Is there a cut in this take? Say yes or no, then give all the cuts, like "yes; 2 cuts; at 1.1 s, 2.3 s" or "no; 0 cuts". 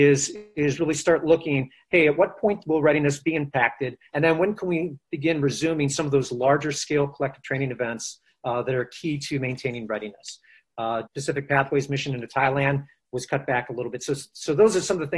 yes; 1 cut; at 11.1 s